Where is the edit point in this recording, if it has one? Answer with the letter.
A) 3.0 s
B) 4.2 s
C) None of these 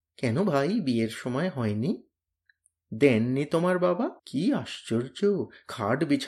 B